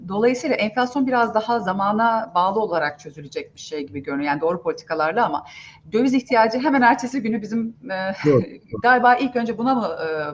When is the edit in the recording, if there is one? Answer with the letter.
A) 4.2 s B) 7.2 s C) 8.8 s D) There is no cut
C